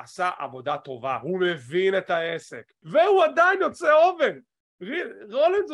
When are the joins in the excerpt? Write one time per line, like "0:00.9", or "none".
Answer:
0:02.8